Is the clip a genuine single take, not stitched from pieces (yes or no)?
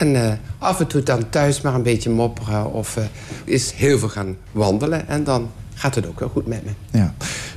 no